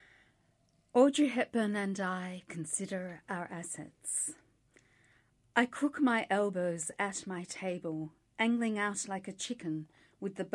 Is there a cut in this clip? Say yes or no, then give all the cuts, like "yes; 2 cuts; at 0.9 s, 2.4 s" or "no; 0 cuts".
no; 0 cuts